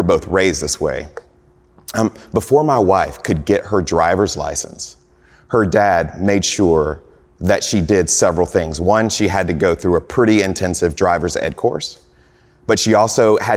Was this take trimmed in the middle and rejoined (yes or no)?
no